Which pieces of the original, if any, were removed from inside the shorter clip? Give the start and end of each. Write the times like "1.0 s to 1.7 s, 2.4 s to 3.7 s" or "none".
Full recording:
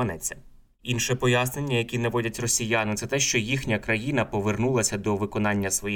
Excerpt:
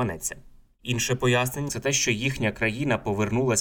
1.7 s to 3.0 s